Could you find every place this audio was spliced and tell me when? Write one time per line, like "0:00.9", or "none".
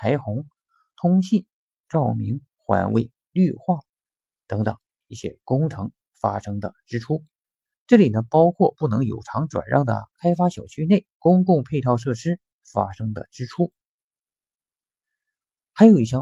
0:07.7
0:11.1